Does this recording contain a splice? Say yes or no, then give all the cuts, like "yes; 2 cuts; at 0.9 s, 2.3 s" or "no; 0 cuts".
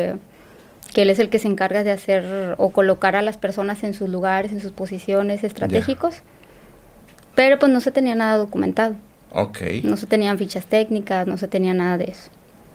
no; 0 cuts